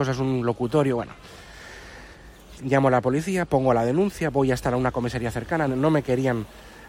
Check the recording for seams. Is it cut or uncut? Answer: cut